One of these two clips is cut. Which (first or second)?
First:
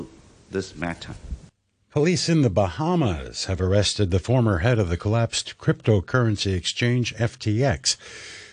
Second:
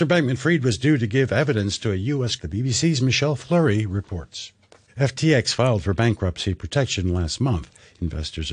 second